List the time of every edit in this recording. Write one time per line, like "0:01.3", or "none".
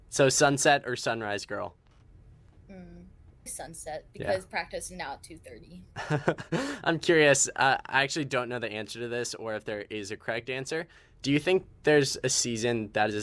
0:03.5